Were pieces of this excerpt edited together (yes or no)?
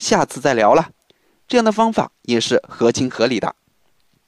no